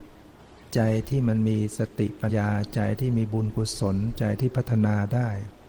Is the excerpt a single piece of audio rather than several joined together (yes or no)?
no